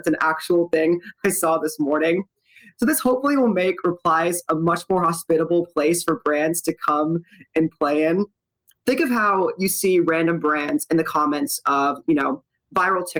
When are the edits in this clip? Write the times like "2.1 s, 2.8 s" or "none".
none